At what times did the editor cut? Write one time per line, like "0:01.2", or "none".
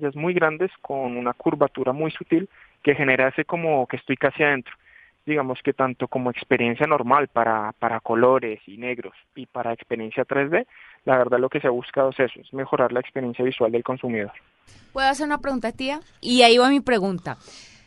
0:16.2